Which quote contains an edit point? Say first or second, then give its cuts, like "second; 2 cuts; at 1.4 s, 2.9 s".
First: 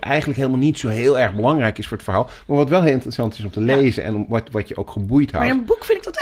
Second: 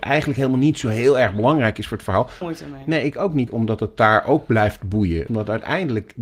second; 3 cuts; at 2.4 s, 3.5 s, 5.3 s